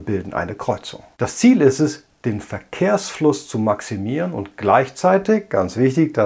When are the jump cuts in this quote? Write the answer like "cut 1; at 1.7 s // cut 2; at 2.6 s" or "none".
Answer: cut 1; at 1.1 s